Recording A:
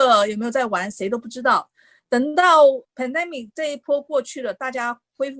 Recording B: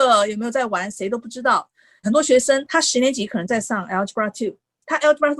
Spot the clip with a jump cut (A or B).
B